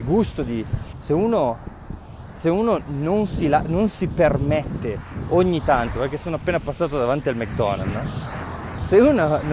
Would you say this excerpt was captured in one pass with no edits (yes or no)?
no